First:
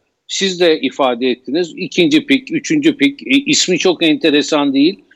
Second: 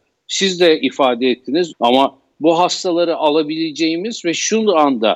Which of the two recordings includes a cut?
second; 1 cut; at 1.7 s

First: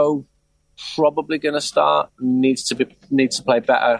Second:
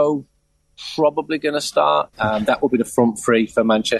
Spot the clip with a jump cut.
second; 1 cut; at 2.1 s

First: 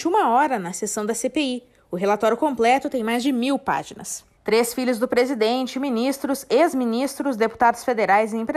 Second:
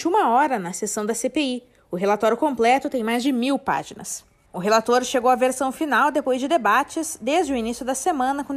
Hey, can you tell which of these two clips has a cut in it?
first; 1 cut; at 4.4 s

